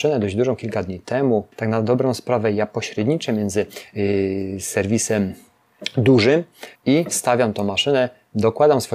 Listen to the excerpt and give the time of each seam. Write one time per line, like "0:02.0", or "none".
0:01.5
0:06.8